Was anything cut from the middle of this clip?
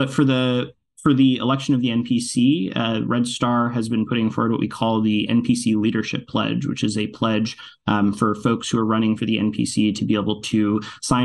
no; 0 cuts

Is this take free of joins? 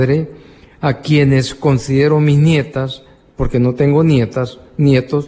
yes; 0 cuts

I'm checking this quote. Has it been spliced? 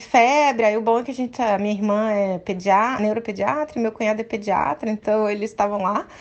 no; 0 cuts

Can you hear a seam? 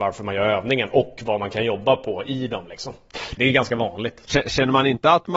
yes; 1 cut; at 3.4 s

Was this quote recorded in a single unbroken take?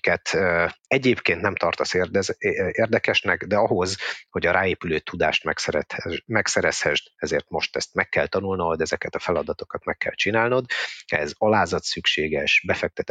yes; 0 cuts

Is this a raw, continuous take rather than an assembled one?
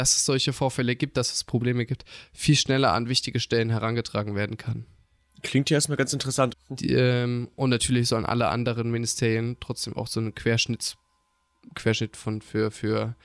no; 1 cut; at 6.5 s

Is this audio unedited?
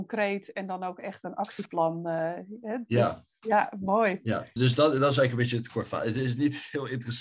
no; 1 cut; at 4.6 s

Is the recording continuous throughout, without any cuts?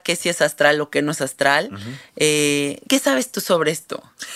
no; 1 cut; at 2.9 s

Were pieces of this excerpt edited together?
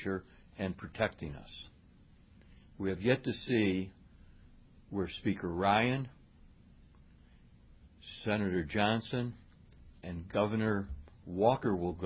no; 0 cuts

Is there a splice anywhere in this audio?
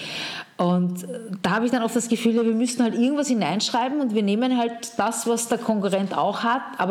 no; 0 cuts

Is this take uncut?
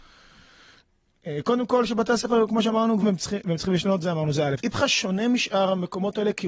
no; 2 cuts; at 3.0 s, 4.6 s

